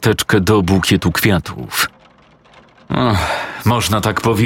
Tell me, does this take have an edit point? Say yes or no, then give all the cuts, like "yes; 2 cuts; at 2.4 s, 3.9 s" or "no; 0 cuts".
no; 0 cuts